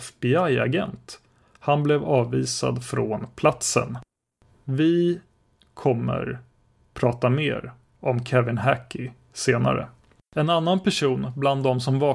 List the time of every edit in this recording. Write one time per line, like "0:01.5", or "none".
0:10.3

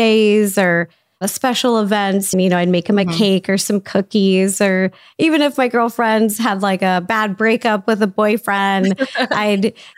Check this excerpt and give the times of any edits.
0:02.3

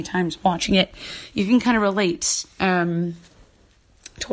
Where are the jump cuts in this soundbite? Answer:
none

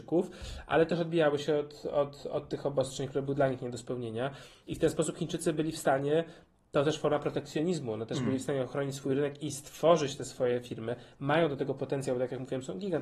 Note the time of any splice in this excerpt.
none

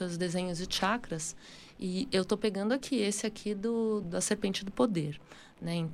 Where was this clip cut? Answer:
0:04.0

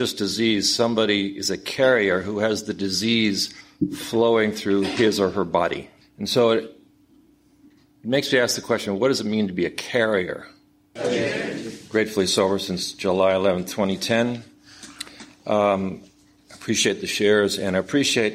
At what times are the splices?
0:06.0
0:11.0

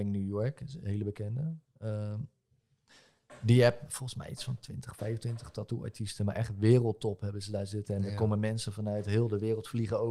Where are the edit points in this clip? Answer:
none

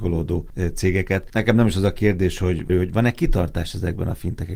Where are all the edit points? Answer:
0:02.7

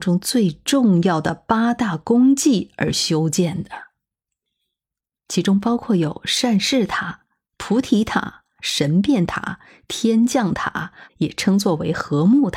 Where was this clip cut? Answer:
0:08.6
0:11.1

